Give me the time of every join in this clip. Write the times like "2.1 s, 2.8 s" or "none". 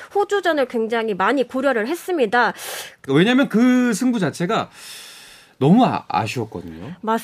3.1 s